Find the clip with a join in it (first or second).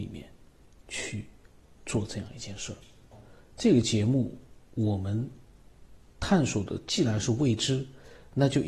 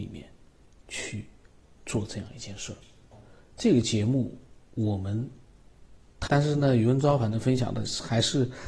second